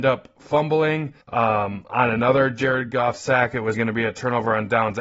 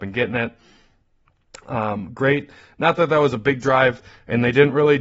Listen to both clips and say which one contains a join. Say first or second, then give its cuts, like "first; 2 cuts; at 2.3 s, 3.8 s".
first; 2 cuts; at 1.2 s, 3.7 s